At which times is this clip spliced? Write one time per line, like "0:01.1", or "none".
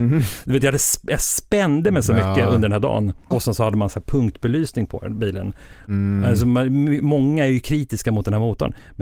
0:03.3
0:05.9